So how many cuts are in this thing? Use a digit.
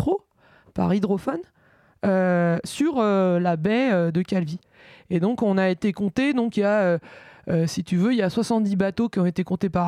0